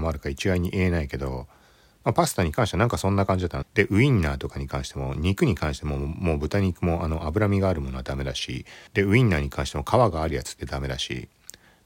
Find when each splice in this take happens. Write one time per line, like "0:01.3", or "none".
0:03.6
0:08.9

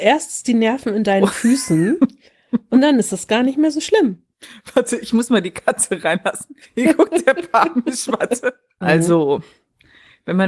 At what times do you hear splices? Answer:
0:08.8

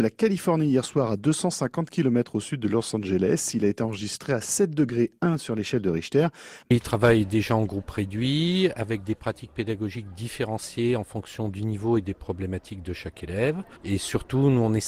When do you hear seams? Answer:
0:06.6

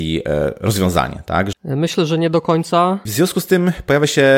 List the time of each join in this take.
0:01.5
0:03.1

